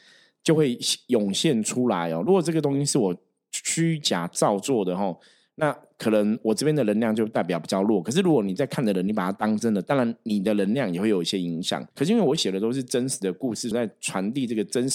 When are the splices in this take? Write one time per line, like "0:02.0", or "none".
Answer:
0:11.9
0:13.7